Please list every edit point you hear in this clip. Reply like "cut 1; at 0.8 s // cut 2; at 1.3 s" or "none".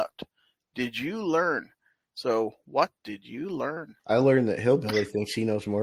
cut 1; at 2.1 s // cut 2; at 4.0 s